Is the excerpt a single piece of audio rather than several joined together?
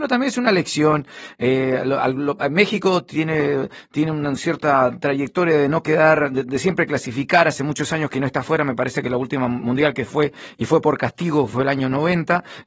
yes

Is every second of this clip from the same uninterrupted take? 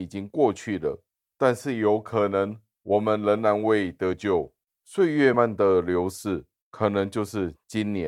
no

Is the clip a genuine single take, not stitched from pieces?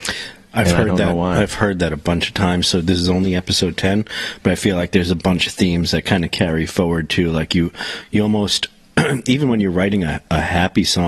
yes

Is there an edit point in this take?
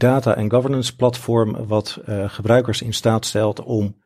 no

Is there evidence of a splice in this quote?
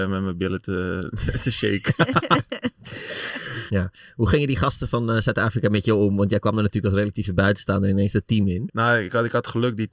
yes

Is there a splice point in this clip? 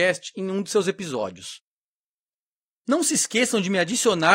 no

